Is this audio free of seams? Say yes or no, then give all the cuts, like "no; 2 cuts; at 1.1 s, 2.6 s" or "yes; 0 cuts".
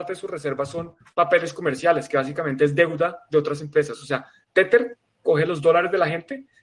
yes; 0 cuts